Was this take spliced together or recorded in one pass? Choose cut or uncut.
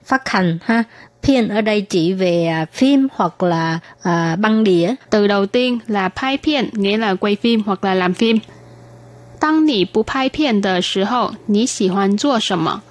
cut